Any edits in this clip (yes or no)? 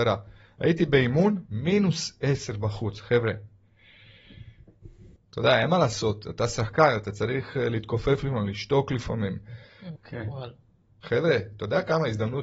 yes